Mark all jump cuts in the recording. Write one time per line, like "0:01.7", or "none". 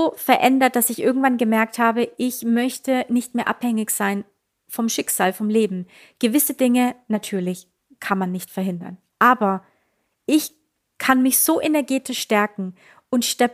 none